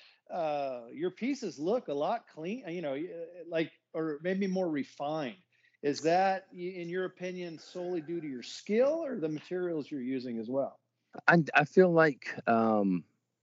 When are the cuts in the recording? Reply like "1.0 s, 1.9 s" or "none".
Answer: none